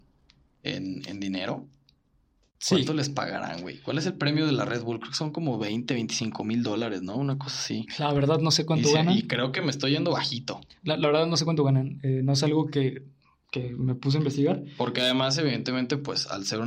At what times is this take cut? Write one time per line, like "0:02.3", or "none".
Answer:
none